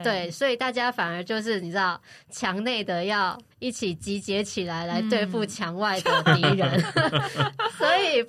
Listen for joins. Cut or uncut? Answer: cut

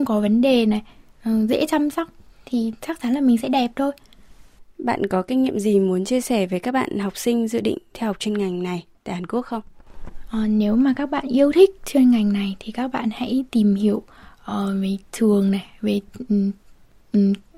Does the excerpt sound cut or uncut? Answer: uncut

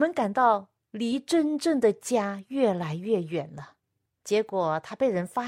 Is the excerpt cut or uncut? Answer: cut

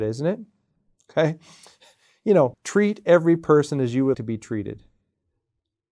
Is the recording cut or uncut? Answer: cut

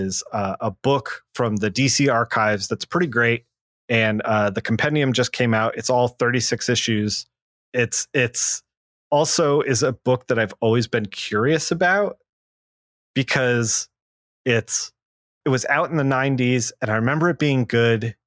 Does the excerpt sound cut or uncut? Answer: cut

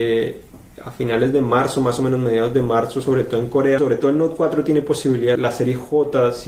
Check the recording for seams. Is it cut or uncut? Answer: cut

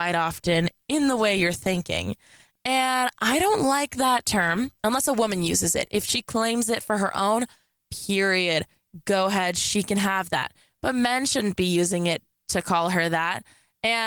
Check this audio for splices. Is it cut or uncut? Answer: uncut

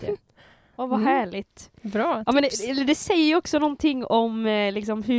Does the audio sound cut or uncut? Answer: uncut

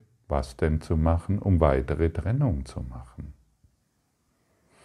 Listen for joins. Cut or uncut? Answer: uncut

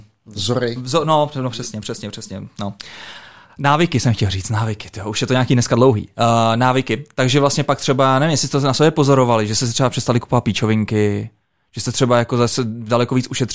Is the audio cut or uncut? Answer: uncut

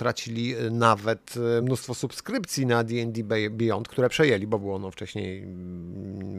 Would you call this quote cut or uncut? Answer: uncut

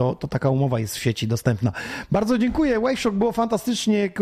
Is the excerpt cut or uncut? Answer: uncut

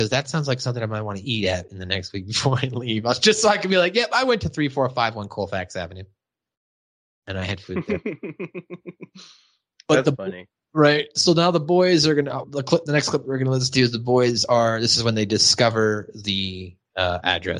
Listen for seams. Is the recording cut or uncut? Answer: cut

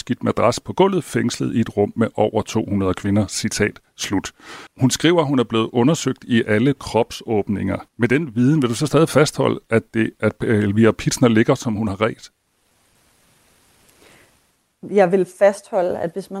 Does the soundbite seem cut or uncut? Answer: cut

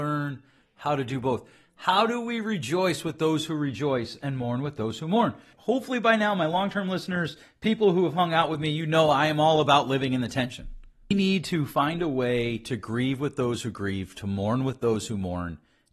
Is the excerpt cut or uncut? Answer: cut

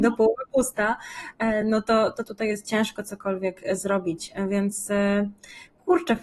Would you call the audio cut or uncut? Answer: uncut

